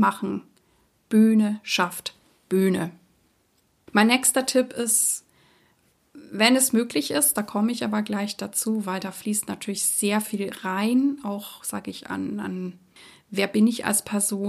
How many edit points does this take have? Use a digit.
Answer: 0